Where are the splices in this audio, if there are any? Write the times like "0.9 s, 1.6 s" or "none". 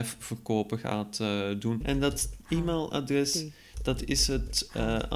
1.8 s